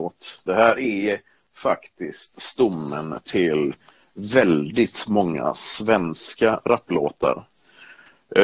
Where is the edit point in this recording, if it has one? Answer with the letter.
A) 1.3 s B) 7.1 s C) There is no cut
C